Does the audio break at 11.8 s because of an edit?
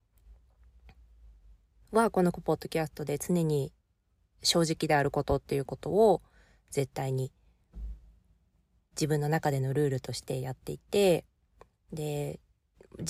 no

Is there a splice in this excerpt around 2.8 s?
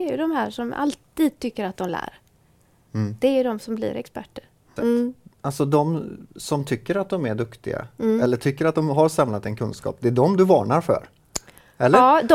no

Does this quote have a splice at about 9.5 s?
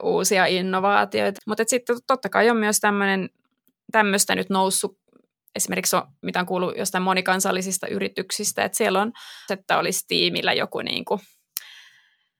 yes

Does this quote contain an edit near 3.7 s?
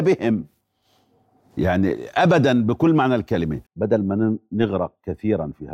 yes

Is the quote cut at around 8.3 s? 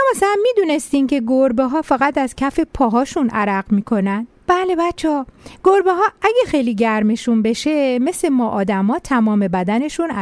no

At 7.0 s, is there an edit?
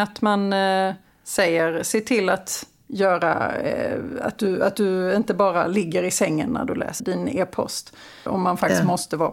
yes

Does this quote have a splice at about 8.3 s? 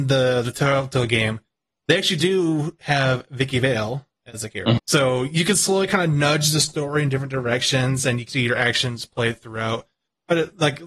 yes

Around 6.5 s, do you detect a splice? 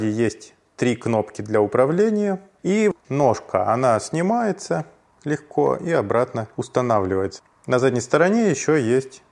yes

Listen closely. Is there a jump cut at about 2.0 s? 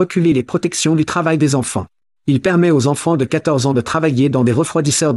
no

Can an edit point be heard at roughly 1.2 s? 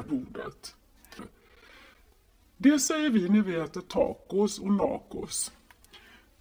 yes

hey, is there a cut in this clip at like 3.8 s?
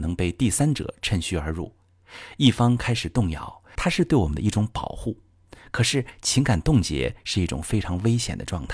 yes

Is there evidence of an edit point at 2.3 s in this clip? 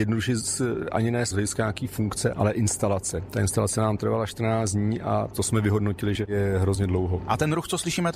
yes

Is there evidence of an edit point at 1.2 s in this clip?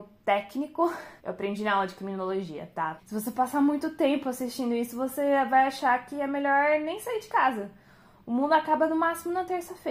yes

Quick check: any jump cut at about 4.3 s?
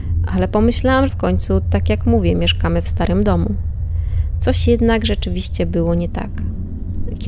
no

